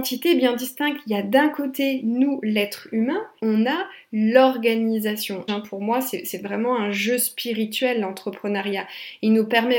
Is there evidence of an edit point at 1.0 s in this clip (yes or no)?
no